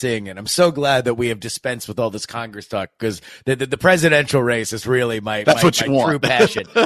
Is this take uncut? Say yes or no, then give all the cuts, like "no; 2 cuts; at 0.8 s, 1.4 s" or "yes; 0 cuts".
yes; 0 cuts